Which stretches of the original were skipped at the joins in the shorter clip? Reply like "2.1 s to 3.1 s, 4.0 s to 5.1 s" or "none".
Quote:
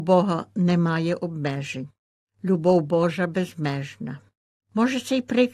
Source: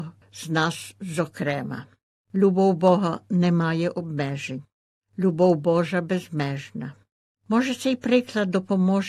none

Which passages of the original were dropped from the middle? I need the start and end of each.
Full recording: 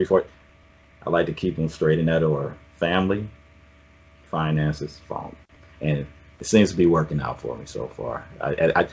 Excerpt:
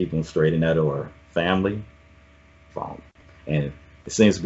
4.2 s to 5.0 s

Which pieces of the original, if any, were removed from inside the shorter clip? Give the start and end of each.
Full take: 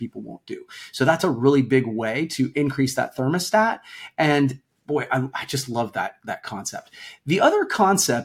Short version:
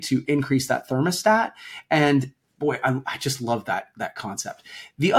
none

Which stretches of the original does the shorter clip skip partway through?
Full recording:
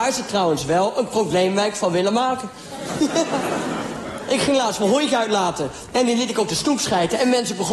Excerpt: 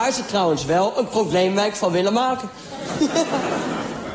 none

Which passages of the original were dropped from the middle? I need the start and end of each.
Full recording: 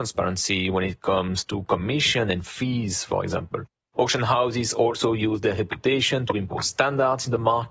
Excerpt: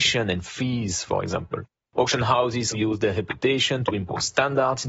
4.7 s to 5.1 s

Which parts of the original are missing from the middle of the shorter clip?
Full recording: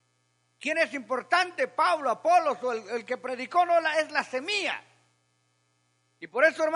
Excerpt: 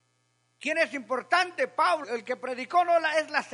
2.0 s to 2.8 s

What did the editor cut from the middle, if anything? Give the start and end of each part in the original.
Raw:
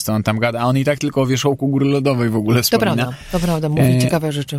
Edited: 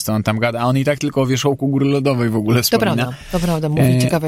none

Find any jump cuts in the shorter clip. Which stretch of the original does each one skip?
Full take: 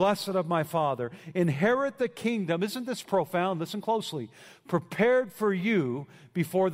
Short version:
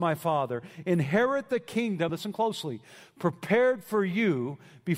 2.6 s to 3.6 s

